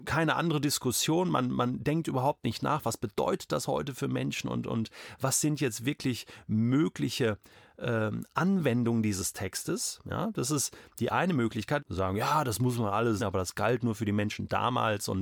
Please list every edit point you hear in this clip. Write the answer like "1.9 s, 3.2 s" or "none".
11.8 s, 13.2 s